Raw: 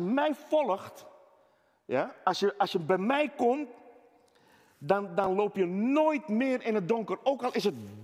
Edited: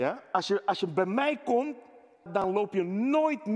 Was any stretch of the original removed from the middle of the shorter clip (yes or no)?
yes